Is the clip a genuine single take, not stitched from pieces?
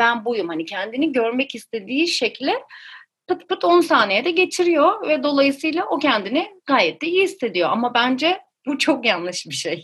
no; 1 cut; at 3.5 s

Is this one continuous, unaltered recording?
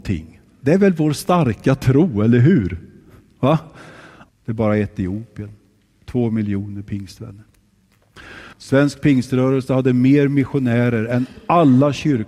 no; 2 cuts; at 4.3 s, 8.5 s

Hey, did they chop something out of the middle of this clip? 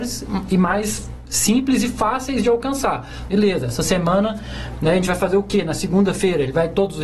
yes; 1 cut; at 3.3 s

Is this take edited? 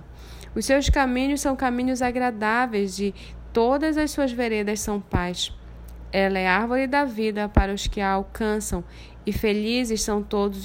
no; 0 cuts

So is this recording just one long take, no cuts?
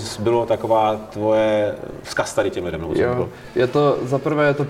yes; 0 cuts

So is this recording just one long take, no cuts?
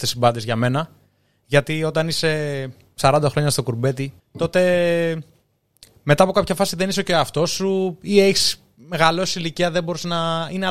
no; 1 cut; at 4.2 s

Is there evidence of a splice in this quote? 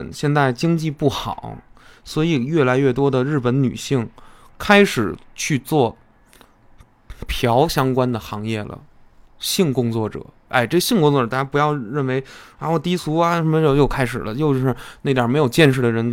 no; 0 cuts

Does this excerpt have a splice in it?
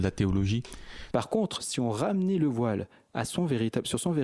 yes; 1 cut; at 1.1 s

